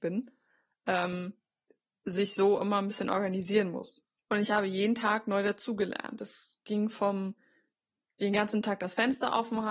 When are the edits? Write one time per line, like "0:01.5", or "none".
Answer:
0:04.2